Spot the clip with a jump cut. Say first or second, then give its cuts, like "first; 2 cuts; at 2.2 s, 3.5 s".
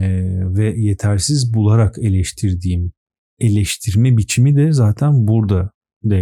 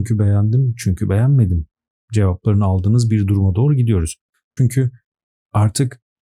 second; 1 cut; at 4.6 s